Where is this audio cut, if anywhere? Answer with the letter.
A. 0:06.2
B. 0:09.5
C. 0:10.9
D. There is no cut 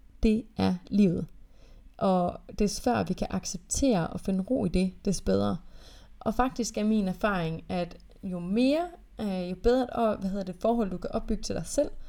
D